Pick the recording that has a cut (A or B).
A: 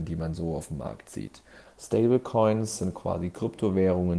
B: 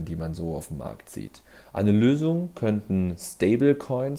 A